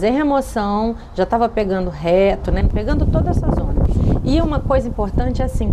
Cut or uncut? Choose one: cut